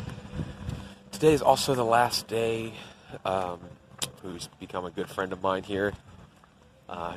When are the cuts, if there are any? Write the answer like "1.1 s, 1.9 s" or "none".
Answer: 4.2 s